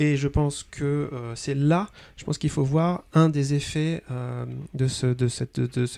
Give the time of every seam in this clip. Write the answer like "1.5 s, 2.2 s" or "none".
none